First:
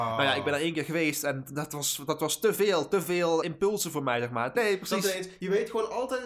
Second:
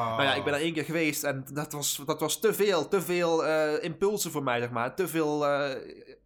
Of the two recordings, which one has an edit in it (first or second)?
first